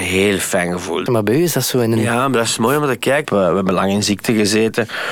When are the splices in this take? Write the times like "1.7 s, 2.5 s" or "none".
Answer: 1.1 s, 3.2 s